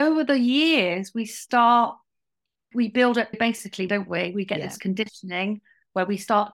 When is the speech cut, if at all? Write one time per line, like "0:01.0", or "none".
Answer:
0:03.9